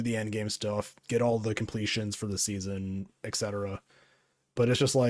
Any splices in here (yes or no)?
no